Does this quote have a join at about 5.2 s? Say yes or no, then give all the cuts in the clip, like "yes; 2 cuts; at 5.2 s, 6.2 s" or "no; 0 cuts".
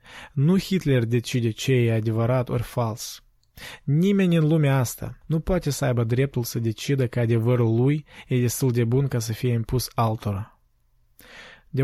yes; 1 cut; at 5.2 s